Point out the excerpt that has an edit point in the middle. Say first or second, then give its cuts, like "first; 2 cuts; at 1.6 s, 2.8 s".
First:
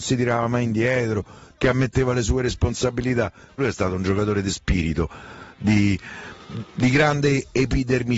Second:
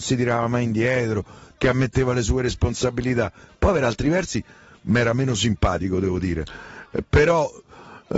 first; 1 cut; at 3.6 s